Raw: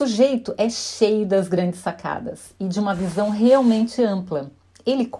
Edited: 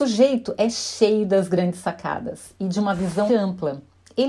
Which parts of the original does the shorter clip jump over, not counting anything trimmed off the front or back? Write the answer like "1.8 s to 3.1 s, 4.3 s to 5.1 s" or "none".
3.3 s to 4.0 s